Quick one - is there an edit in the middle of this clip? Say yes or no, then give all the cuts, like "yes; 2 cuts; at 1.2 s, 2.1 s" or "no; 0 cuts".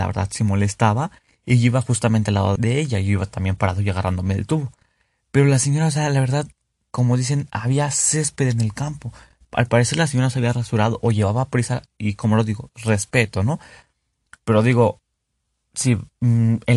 yes; 1 cut; at 2.6 s